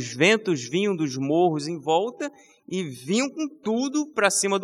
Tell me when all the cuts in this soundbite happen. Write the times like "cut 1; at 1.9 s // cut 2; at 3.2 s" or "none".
none

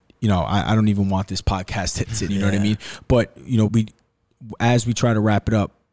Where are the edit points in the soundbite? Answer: cut 1; at 2.3 s // cut 2; at 3.7 s

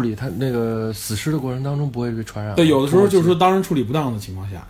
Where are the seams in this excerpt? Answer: none

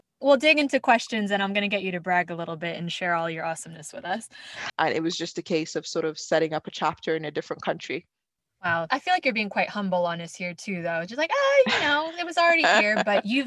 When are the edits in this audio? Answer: cut 1; at 4.7 s

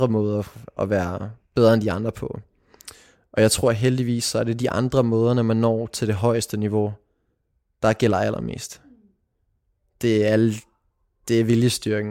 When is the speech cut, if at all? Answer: none

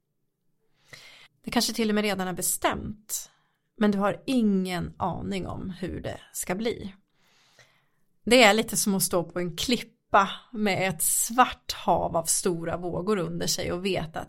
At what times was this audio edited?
cut 1; at 1.3 s

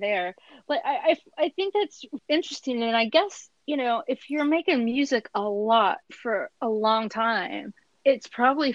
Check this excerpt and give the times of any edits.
cut 1; at 2.2 s // cut 2; at 6.0 s

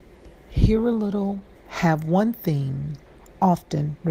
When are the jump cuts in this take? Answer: cut 1; at 1.6 s

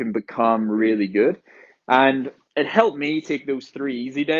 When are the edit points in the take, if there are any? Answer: none

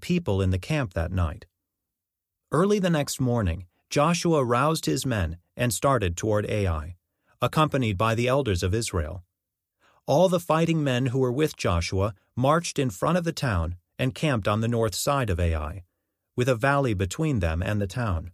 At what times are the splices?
none

